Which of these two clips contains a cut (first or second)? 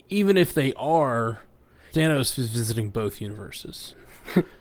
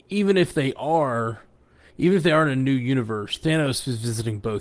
first